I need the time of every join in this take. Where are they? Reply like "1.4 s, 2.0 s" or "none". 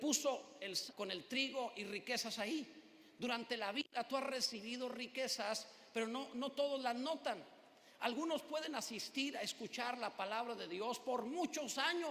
0.9 s